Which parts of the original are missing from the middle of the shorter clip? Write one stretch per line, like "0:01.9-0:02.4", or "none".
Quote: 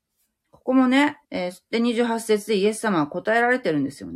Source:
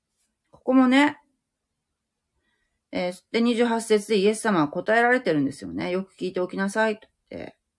0:01.2-0:02.9